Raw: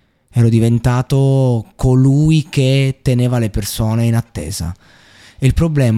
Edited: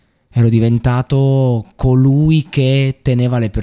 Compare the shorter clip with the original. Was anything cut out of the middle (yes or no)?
no